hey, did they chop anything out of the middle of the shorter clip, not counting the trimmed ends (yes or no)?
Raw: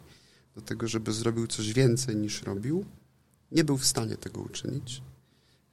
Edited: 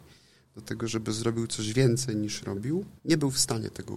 yes